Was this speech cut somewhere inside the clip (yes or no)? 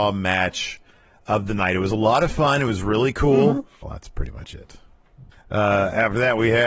yes